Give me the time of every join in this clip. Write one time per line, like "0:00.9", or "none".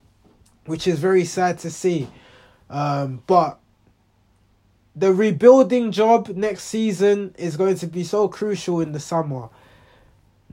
none

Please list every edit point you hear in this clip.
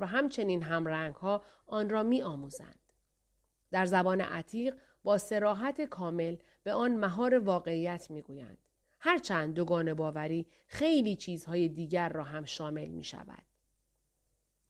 0:08.8

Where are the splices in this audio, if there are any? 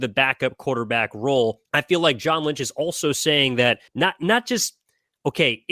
0:01.6
0:03.9

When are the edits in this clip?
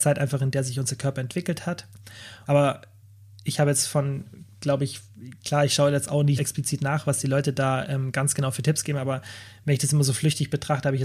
0:02.5
0:06.4

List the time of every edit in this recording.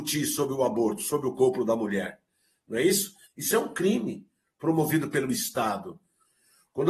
0:03.2

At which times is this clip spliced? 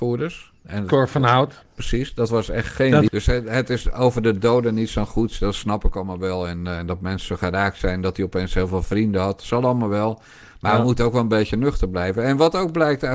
0:03.1

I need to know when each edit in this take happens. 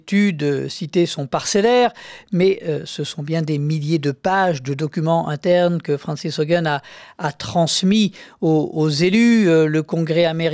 none

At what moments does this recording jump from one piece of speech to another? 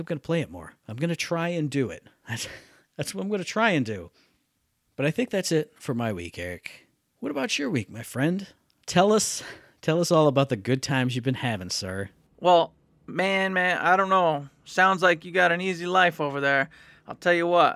none

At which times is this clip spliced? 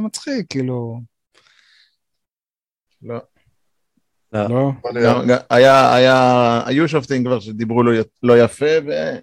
0:02.9

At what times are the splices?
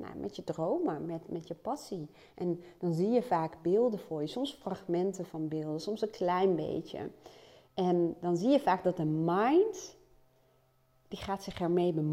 none

